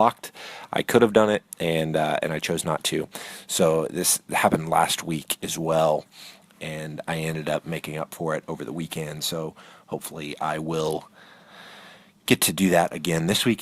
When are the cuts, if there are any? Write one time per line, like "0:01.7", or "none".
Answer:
none